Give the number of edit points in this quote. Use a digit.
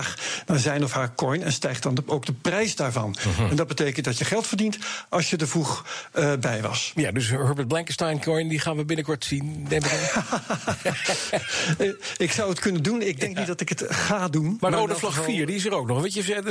1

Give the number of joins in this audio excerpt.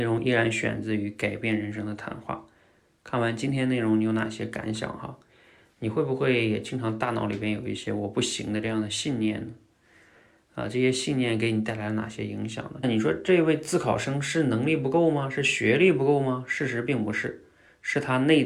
1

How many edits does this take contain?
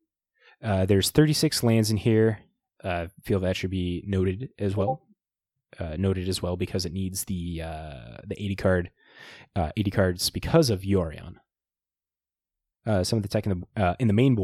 0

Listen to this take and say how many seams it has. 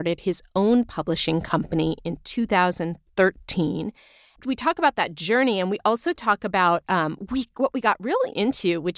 1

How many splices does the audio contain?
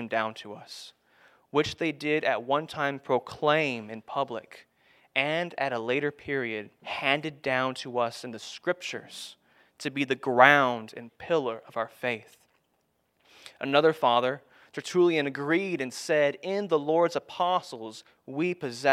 1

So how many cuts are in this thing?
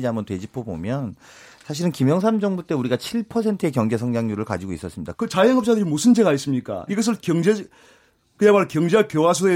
2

